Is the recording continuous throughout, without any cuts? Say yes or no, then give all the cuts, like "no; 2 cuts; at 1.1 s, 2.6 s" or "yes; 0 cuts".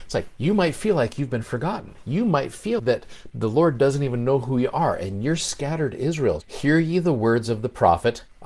no; 2 cuts; at 2.8 s, 6.4 s